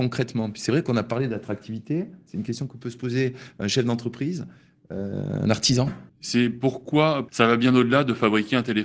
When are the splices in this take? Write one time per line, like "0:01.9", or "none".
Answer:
0:06.1
0:07.3